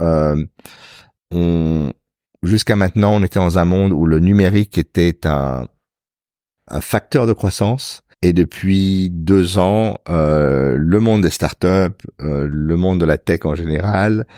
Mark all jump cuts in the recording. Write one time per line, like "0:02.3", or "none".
0:06.7
0:08.1